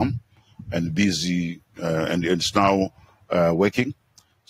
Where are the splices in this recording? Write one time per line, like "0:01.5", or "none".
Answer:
none